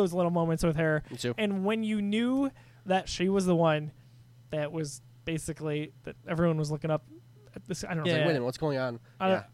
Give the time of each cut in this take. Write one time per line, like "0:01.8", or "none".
0:08.0